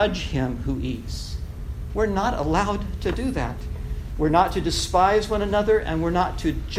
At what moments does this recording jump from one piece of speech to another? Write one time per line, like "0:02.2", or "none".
0:01.9